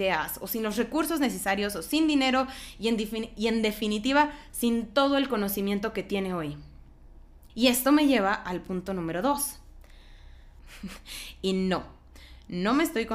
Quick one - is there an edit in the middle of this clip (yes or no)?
yes